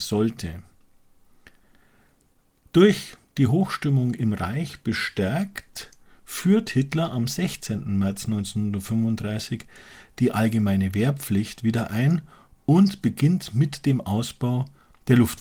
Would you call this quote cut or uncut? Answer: uncut